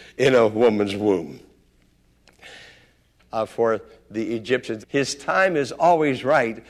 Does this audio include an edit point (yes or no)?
yes